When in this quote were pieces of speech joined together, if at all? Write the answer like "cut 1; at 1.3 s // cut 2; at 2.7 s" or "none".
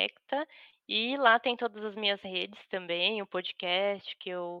none

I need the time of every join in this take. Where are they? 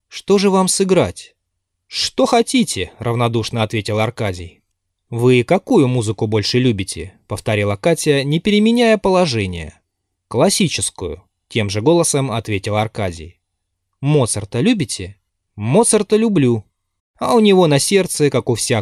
cut 1; at 17.0 s

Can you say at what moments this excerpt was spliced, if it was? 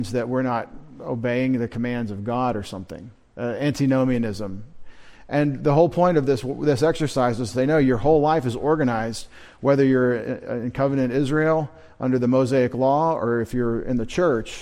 none

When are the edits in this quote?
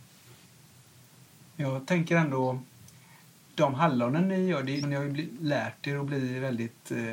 cut 1; at 4.8 s

